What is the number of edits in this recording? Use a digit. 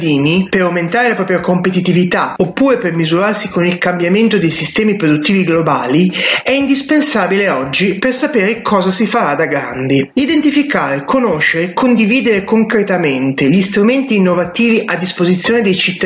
1